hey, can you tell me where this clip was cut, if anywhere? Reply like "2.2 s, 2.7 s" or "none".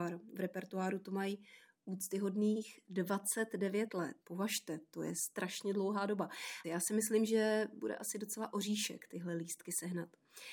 4.2 s, 6.6 s